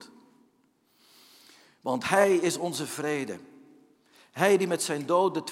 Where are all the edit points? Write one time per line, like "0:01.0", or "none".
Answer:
none